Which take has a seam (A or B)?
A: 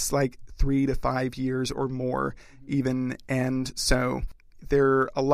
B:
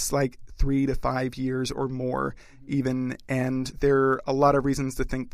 B